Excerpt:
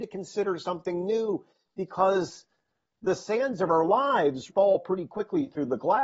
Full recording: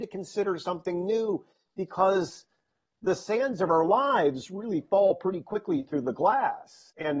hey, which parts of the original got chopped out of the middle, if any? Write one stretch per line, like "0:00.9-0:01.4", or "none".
0:04.5-0:04.8

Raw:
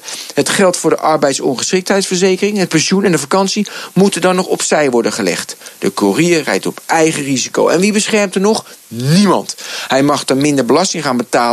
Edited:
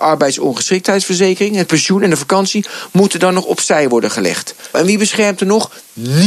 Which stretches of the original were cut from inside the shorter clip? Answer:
0:05.8-0:07.7

